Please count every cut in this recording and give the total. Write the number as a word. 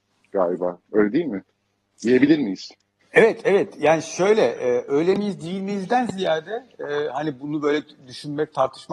one